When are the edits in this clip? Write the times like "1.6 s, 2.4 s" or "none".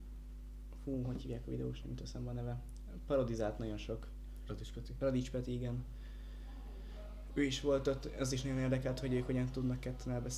none